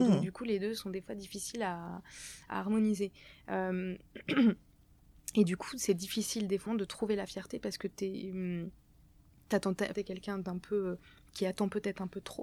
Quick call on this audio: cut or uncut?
cut